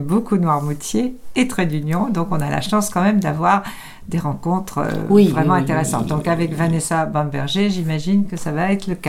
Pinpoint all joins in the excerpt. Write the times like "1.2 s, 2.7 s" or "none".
none

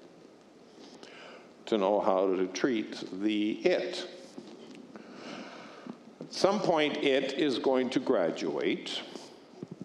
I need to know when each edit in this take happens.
none

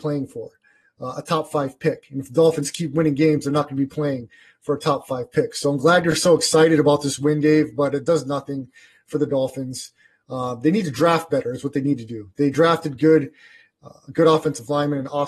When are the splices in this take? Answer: none

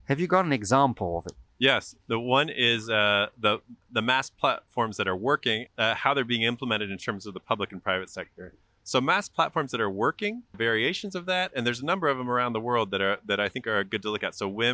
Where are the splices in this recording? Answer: 2.0 s, 5.7 s, 10.5 s

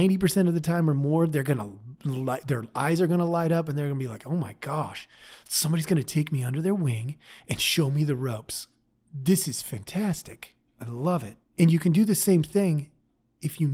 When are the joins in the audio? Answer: 11.5 s

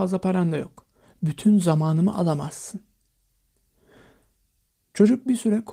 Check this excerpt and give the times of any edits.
none

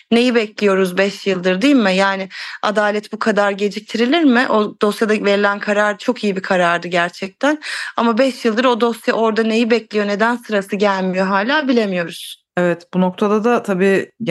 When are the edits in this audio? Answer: none

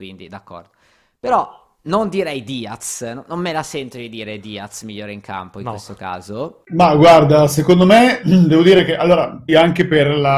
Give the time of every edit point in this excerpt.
6.7 s, 9.5 s

